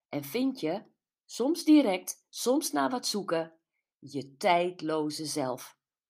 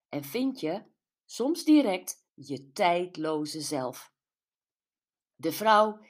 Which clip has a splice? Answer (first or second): second